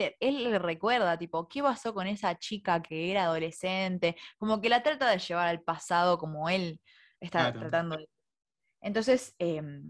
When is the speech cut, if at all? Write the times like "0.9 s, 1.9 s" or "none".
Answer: none

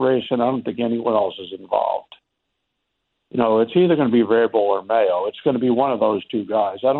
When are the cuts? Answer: none

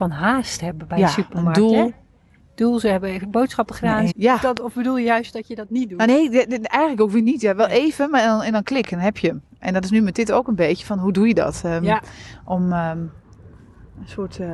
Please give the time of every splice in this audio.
4.1 s

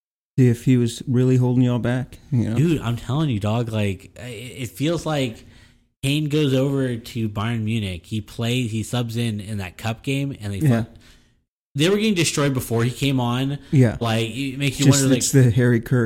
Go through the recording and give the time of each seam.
14.0 s

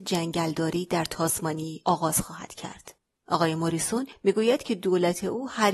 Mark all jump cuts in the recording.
none

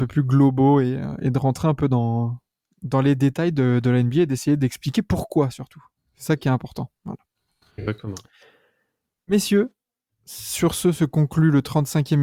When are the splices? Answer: 7.0 s

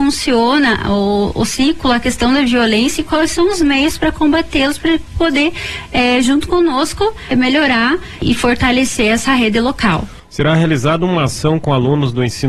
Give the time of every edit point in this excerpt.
10.2 s

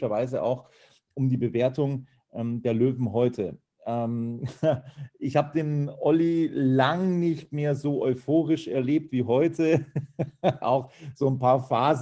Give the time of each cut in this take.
10.6 s

